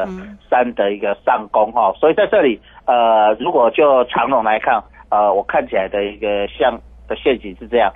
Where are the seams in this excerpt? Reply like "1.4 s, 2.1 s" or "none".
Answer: none